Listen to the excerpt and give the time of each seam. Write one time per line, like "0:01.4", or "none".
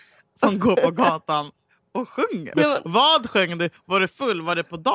0:02.5